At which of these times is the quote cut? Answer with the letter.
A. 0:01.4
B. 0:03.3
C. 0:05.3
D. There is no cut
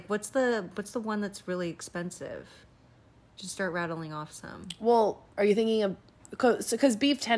C